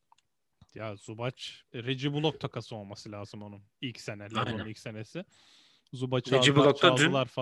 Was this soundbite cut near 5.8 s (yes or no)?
no